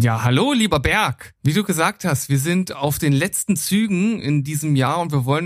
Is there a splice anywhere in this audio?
yes; 1 cut; at 1.4 s

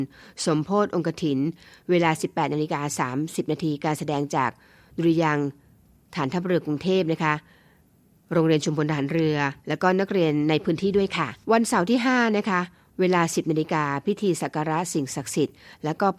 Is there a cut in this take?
yes; 2 cuts; at 9.6 s, 11.4 s

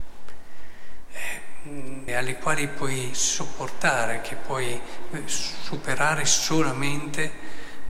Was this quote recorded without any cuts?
no; 1 cut; at 2.1 s

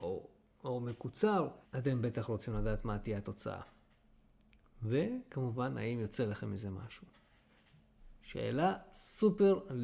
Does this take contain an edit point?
yes; 1 cut; at 1.6 s

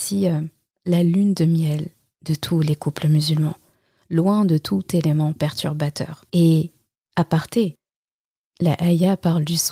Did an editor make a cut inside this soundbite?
yes; 1 cut; at 6.3 s

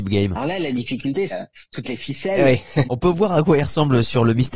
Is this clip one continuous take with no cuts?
no; 2 cuts; at 1.3 s, 2.9 s

